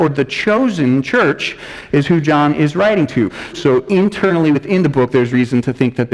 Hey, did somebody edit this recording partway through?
yes; 1 cut; at 3.5 s

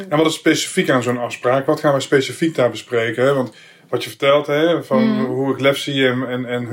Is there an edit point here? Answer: no; 0 cuts

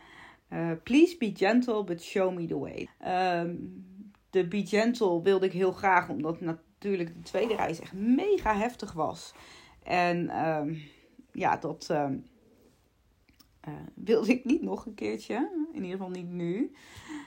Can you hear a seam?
yes; 1 cut; at 2.9 s

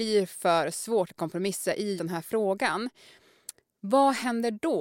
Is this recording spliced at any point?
yes; 1 cut; at 2.0 s

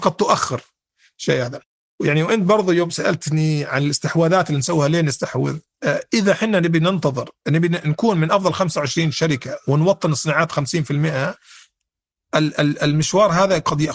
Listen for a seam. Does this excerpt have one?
no; 0 cuts

